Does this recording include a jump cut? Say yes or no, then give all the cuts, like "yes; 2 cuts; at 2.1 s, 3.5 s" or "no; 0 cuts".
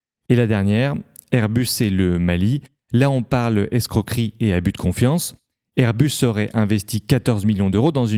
no; 0 cuts